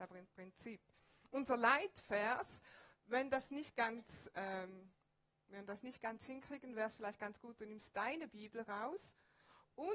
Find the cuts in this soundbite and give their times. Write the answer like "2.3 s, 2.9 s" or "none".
none